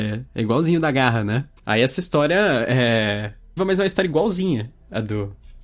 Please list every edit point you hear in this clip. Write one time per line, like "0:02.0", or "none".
0:01.6
0:03.6